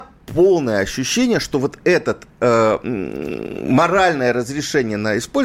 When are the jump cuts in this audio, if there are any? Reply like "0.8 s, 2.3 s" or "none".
none